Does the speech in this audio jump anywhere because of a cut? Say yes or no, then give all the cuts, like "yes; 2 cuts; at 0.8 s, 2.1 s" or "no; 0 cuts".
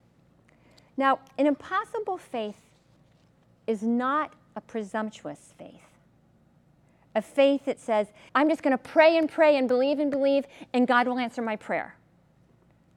yes; 1 cut; at 8.3 s